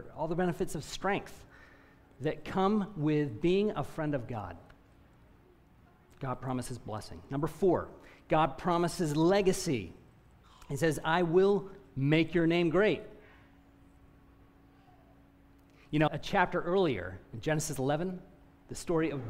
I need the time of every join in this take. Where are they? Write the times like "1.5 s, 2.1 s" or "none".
16.1 s